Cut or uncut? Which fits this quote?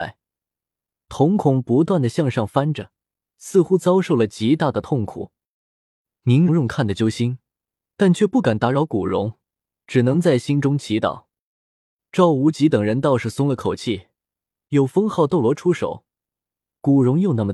cut